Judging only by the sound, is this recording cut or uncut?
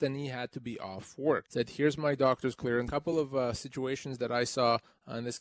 cut